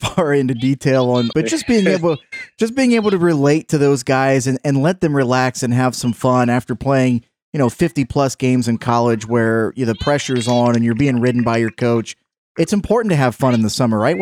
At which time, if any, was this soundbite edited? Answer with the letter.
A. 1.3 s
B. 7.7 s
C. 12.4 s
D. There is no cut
A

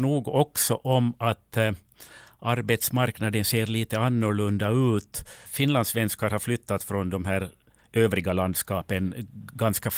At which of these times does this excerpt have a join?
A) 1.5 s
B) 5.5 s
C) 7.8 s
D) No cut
B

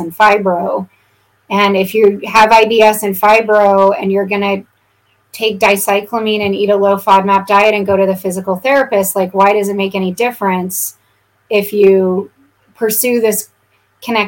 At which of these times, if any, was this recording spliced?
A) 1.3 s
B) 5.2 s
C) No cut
B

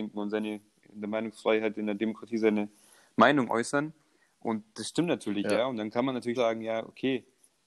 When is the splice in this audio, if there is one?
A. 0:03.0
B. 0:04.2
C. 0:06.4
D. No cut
C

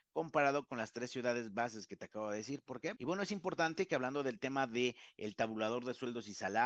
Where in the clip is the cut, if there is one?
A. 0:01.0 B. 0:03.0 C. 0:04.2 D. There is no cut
B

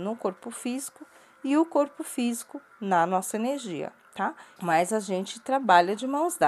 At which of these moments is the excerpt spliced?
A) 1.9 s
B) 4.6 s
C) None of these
B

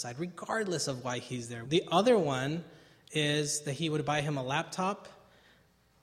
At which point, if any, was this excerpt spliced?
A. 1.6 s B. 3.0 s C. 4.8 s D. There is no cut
A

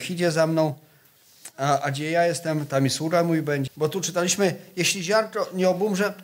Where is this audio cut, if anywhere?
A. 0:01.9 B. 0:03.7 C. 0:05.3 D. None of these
B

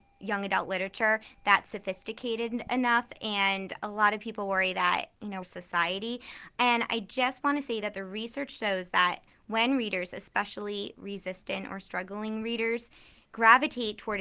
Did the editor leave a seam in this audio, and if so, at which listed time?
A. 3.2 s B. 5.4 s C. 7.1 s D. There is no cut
B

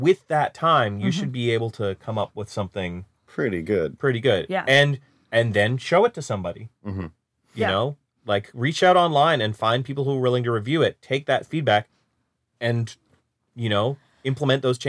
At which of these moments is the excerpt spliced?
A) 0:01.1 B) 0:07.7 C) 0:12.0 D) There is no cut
D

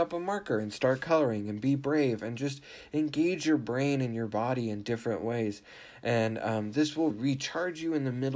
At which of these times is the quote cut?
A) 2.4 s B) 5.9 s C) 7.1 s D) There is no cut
C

